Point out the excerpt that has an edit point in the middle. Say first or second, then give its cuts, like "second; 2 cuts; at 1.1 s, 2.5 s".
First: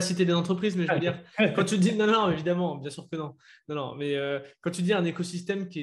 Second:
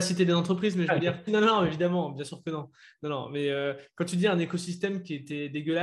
second; 1 cut; at 1.3 s